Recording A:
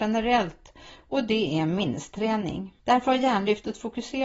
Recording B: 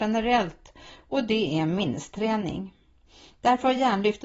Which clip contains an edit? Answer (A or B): A